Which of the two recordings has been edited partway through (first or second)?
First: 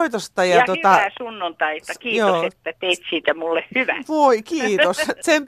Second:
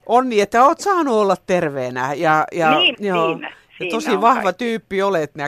second